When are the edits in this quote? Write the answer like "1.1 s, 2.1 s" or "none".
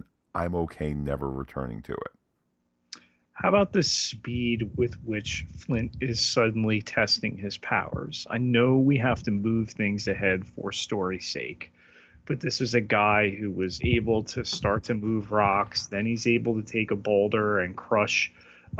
13.8 s

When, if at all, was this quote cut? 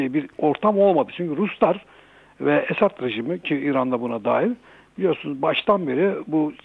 none

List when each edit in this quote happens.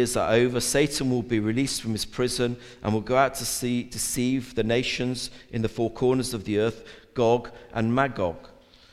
none

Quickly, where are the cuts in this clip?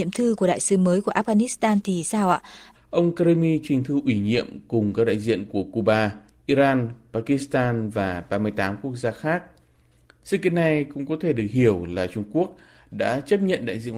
2.7 s

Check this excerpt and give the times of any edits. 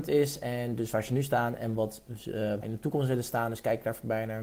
2.6 s

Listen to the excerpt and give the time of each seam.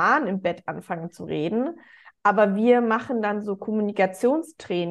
none

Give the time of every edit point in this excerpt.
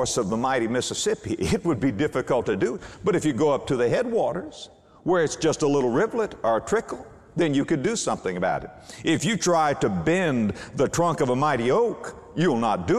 none

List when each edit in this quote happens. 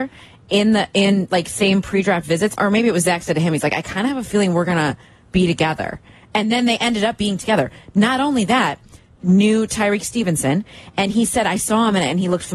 2.6 s, 9.2 s

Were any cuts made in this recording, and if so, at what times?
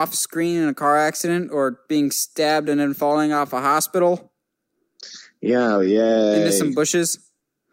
none

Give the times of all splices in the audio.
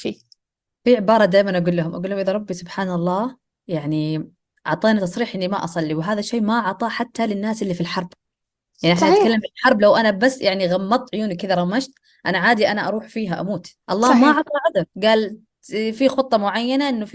13.8 s, 14.9 s

